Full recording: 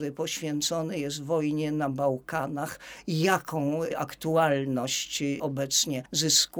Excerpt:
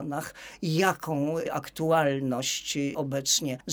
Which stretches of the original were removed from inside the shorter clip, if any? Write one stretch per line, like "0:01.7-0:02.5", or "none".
none